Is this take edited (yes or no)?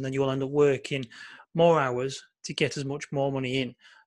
no